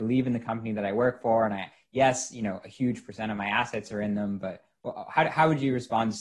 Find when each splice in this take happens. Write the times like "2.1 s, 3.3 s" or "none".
none